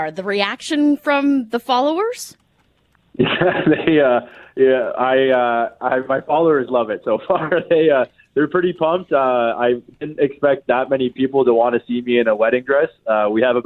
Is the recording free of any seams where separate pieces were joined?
yes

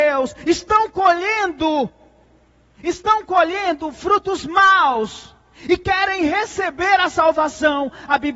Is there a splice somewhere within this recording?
no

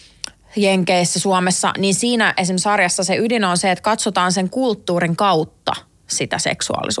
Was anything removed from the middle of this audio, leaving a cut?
yes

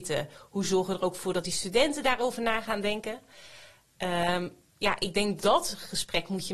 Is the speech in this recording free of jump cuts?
no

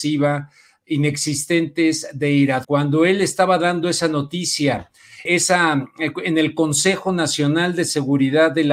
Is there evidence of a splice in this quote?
yes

